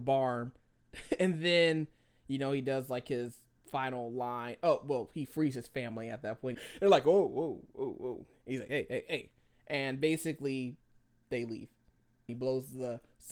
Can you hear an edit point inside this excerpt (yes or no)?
yes